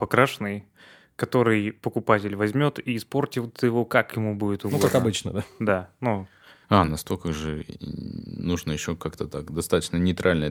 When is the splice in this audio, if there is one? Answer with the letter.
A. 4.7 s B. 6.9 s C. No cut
B